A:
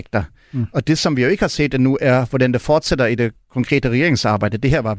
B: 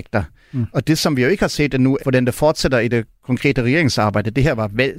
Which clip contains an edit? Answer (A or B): B